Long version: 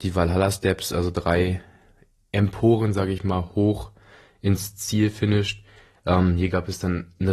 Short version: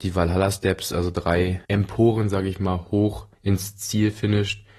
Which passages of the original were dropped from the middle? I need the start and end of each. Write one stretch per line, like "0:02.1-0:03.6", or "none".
0:01.6-0:02.3
0:04.0-0:04.3